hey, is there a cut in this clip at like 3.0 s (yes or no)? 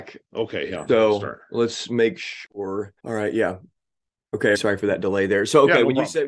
yes